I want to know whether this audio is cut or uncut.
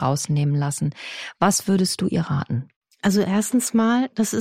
uncut